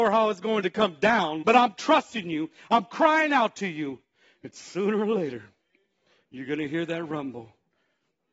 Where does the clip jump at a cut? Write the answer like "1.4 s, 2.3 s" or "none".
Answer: 1.4 s